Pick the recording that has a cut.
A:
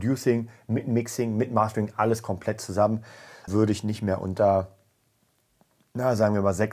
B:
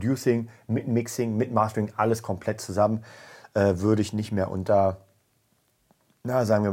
A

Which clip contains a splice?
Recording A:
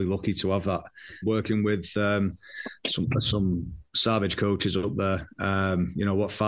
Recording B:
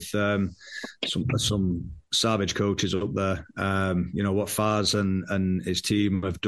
A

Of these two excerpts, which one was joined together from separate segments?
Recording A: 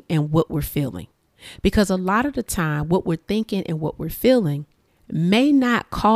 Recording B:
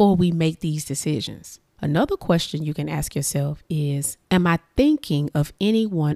B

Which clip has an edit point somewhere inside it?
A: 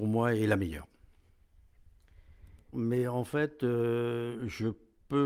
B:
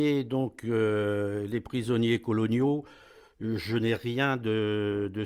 A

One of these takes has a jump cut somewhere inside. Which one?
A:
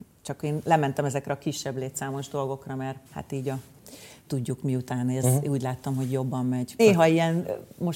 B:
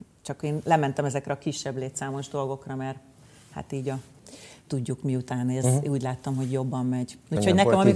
A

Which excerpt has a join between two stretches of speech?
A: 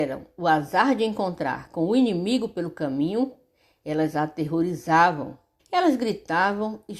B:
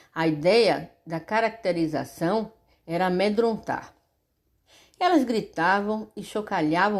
A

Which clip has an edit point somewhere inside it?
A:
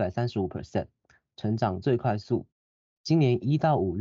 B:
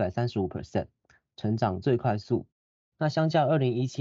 B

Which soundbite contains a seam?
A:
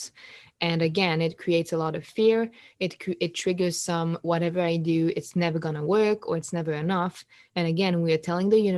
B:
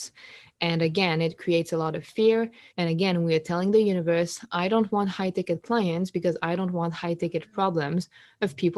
B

